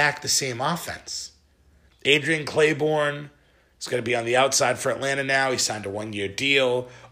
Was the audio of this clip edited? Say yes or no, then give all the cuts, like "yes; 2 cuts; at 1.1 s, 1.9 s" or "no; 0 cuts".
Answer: yes; 1 cut; at 1.9 s